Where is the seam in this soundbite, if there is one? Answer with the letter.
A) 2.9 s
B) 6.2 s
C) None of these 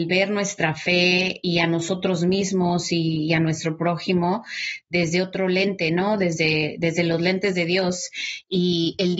C